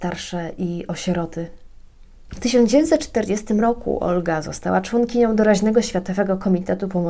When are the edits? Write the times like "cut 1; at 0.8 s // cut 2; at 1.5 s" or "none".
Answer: cut 1; at 2.3 s